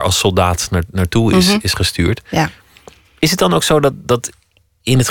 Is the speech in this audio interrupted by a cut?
no; 0 cuts

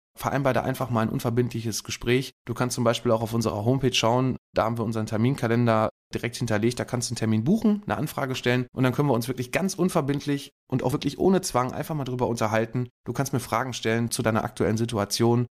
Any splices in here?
no; 0 cuts

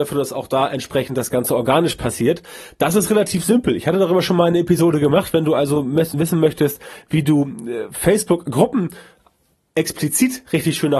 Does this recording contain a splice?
no; 0 cuts

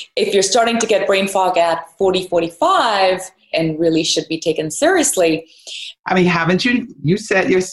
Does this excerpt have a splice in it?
yes; 2 cuts; at 3.5 s, 6.0 s

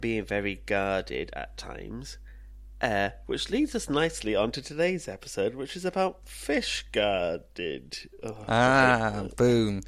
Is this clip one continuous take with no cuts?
yes; 0 cuts

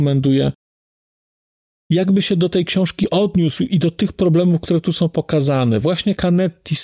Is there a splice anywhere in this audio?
yes; 1 cut; at 1.7 s

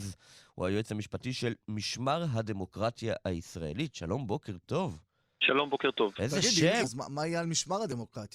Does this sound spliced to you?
yes; 1 cut; at 6.8 s

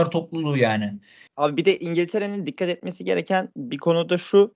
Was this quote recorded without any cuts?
no; 1 cut; at 1.3 s

